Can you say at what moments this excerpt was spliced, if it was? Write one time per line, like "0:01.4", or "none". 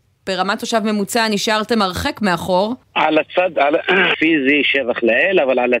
0:02.8
0:04.1